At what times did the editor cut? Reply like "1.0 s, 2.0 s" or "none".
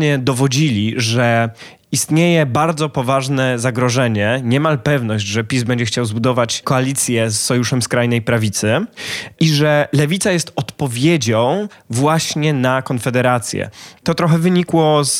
none

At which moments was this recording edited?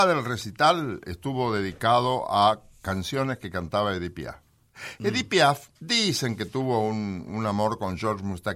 5.8 s

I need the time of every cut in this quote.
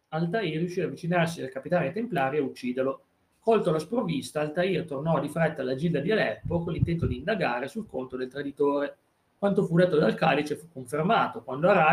3.3 s

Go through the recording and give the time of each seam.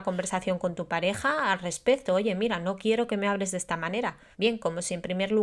4.3 s

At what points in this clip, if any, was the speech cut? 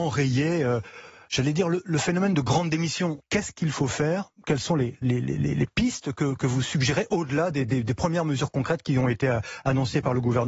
3.2 s

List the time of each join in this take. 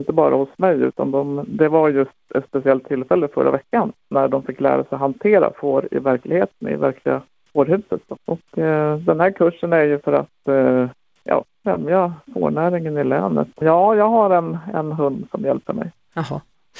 8.2 s, 13.6 s

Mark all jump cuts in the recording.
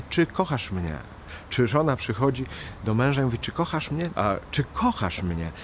4.1 s

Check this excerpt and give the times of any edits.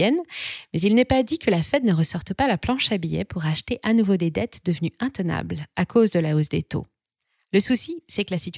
none

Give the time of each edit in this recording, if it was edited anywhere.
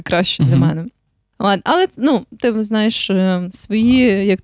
1.3 s

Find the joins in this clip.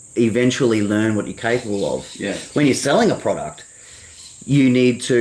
none

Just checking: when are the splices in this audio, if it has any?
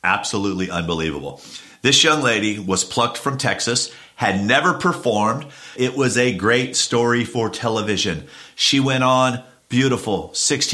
5.8 s

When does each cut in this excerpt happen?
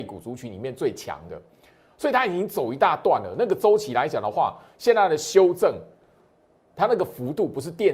none

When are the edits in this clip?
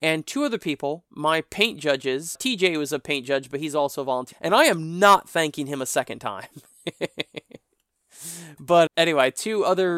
2.3 s, 4.3 s, 8.9 s

